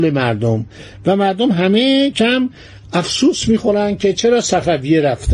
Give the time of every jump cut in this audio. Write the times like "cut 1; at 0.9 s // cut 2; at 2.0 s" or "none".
cut 1; at 2.1 s